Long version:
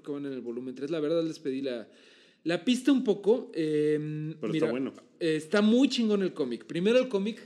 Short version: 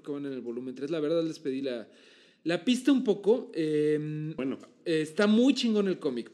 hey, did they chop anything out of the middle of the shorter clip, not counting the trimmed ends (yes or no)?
yes